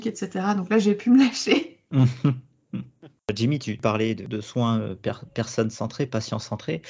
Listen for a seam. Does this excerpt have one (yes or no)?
no